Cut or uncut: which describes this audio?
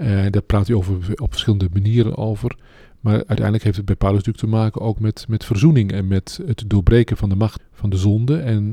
cut